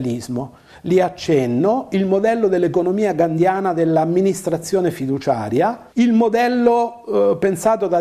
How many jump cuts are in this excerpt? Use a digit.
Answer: 1